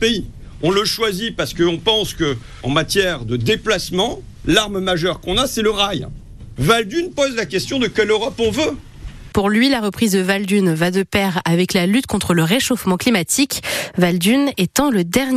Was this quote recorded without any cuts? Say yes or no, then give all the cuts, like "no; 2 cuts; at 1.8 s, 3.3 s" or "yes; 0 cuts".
no; 3 cuts; at 4.4 s, 6.6 s, 9.3 s